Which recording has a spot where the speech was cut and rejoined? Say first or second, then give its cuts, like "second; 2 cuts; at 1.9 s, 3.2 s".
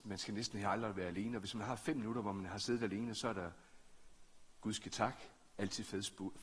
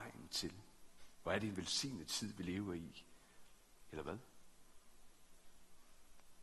second; 2 cuts; at 1.1 s, 3.8 s